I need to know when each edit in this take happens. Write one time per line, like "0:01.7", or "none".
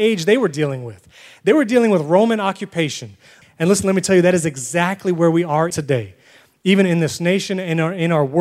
0:03.4
0:05.7